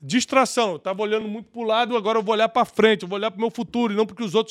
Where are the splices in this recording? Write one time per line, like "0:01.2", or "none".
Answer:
none